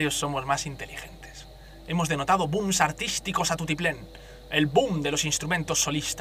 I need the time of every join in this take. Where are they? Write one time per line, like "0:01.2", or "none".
none